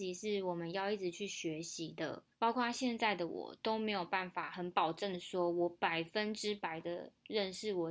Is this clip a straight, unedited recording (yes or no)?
yes